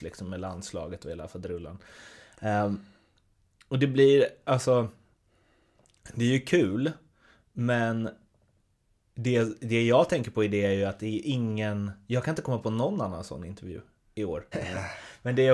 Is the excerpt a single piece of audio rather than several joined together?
no; 1 cut; at 14.5 s

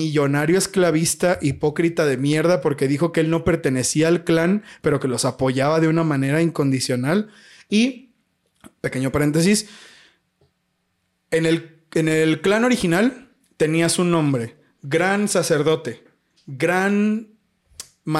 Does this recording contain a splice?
no; 0 cuts

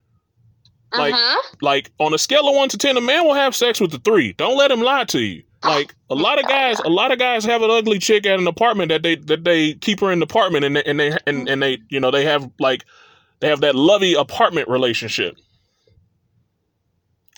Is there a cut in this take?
yes; 1 cut; at 5.6 s

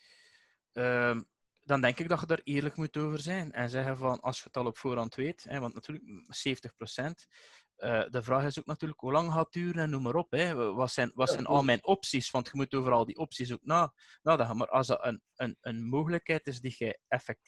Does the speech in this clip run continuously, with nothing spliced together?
yes; 0 cuts

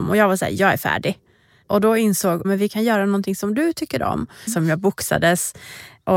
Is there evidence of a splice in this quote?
yes; 2 cuts; at 2.4 s, 4.5 s

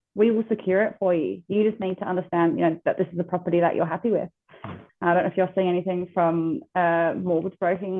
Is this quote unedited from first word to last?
no; 1 cut; at 4.9 s

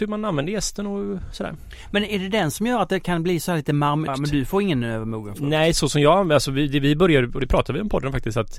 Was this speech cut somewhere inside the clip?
yes; 1 cut; at 4.1 s

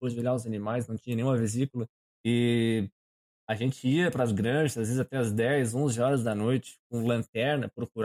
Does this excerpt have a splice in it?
yes; 1 cut; at 2.2 s

